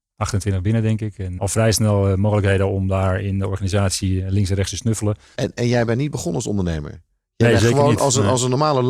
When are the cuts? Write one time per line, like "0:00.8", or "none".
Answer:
0:01.4
0:05.3

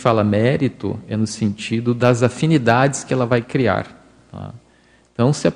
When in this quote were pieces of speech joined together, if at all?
none

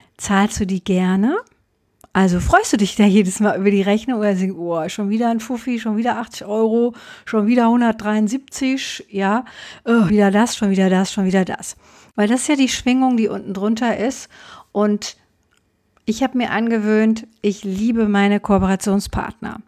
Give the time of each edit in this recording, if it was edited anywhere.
0:10.1

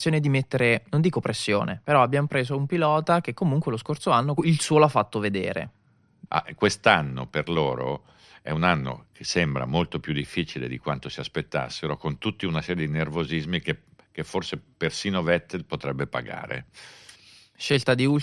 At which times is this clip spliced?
0:04.4
0:06.3

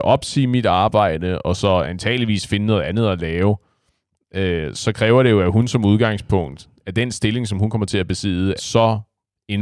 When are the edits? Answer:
0:08.6

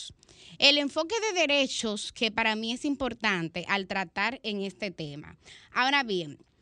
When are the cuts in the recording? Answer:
none

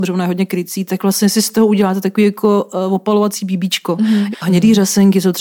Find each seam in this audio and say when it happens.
0:04.3

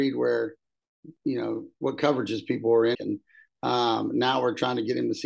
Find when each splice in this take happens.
0:02.9

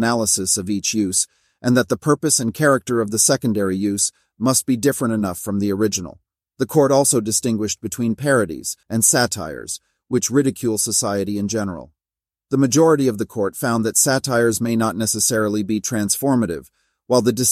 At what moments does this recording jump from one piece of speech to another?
0:08.8

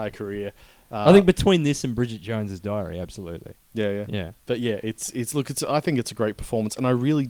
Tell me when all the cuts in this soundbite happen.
0:04.4

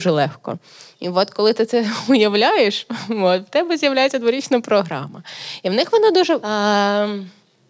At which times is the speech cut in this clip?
0:06.4

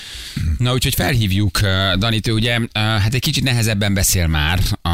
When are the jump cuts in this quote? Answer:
none

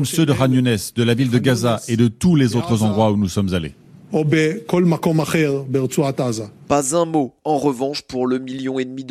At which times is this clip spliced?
none

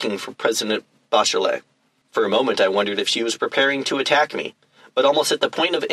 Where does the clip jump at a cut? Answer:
0:02.0

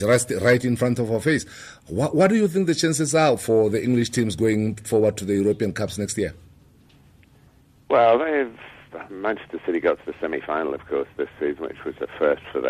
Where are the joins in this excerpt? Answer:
none

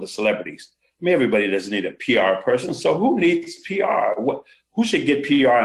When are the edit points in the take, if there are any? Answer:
none

